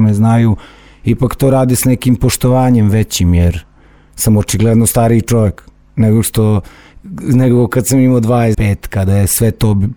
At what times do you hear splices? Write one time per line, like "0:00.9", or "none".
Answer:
0:08.5

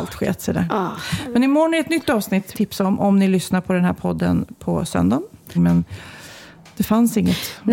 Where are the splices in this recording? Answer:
0:02.5
0:05.5

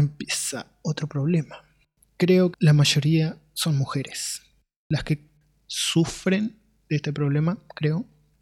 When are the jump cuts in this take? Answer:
0:02.5

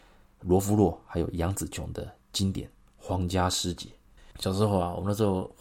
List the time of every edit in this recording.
none

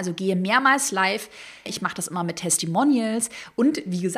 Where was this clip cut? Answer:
0:01.7

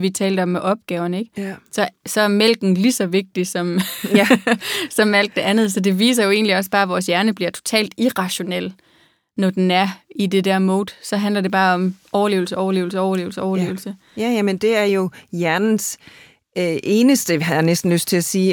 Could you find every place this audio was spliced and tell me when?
none

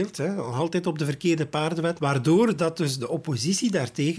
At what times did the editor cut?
0:02.0

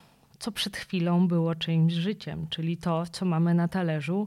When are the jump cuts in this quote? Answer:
none

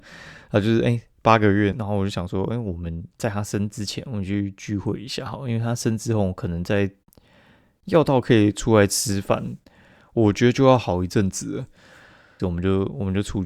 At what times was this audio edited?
0:01.7
0:12.4

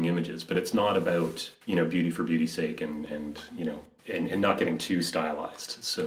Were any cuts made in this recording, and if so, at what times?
none

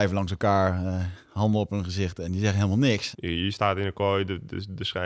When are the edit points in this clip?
0:03.1

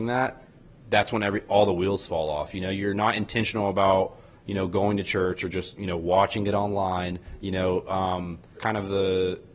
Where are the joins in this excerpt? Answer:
0:08.6

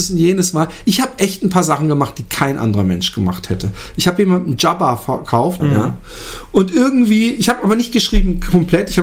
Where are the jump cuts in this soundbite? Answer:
0:05.6

